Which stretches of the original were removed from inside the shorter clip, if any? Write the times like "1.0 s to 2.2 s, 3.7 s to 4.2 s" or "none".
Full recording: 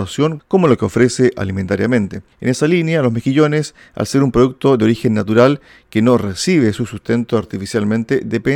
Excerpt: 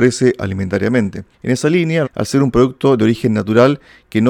3.0 s to 3.8 s